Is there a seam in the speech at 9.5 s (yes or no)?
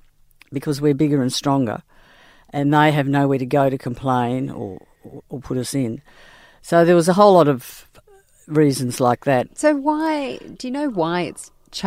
yes